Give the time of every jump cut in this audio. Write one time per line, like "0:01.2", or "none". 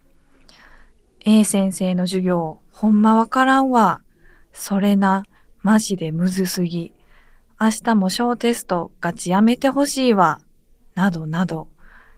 none